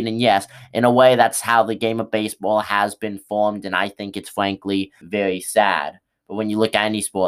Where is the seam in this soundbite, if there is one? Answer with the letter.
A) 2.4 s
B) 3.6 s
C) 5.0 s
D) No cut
C